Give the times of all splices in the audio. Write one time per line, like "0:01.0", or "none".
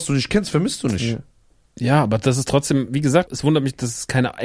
0:03.3